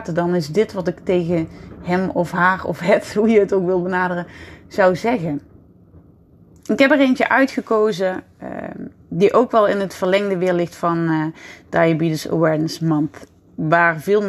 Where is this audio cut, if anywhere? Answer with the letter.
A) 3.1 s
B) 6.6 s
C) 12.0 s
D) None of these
B